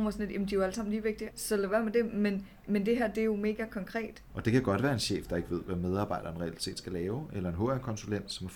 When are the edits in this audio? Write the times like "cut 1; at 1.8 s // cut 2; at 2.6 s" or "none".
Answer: cut 1; at 1.3 s // cut 2; at 4.3 s